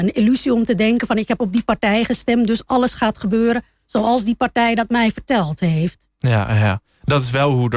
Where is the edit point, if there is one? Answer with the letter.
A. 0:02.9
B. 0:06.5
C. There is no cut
C